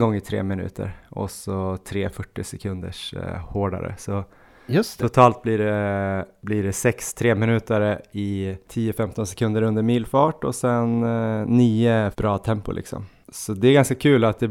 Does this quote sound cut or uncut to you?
cut